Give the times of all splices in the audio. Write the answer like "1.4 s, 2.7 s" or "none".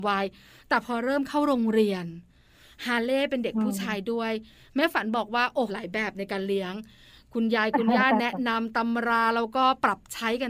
5.7 s